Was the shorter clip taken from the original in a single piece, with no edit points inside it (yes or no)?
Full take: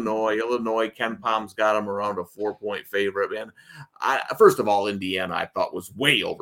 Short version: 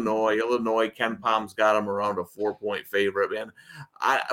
yes